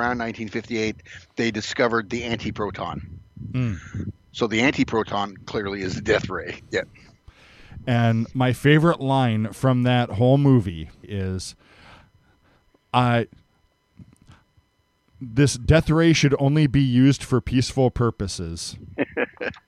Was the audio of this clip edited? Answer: yes; 2 cuts; at 6.6 s, 11.0 s

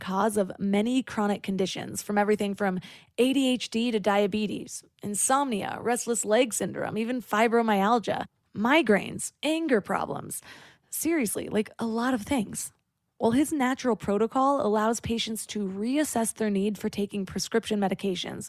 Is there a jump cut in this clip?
no; 0 cuts

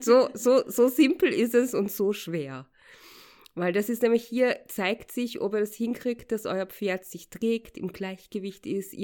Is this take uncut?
yes; 0 cuts

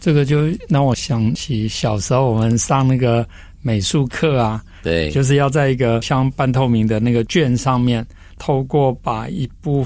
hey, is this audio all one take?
no; 1 cut; at 4.8 s

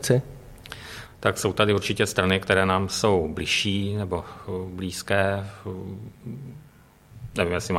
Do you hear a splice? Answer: no; 0 cuts

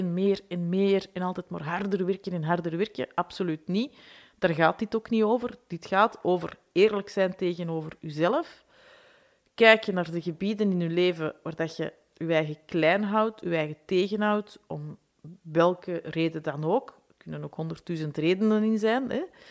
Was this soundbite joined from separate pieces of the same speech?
no; 0 cuts

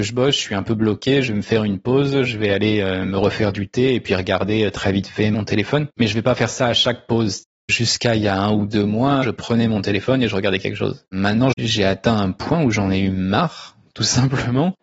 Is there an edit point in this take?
yes; 2 cuts; at 9.2 s, 11.5 s

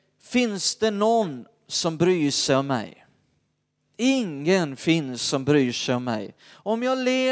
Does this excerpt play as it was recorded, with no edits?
yes; 0 cuts

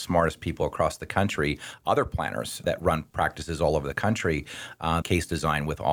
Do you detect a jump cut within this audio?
yes; 2 cuts; at 2.6 s, 5.0 s

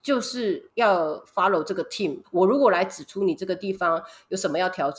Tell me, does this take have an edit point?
yes; 1 cut; at 2.2 s

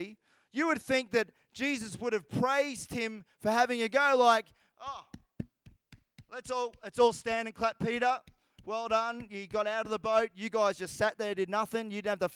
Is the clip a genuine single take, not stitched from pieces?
yes; 0 cuts

